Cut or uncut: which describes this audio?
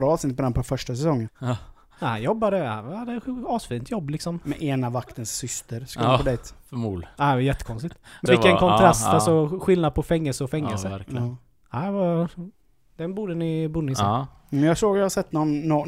cut